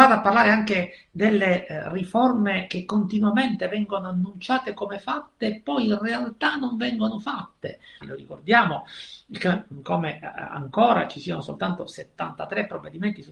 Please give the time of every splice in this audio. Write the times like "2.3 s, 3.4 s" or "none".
8.0 s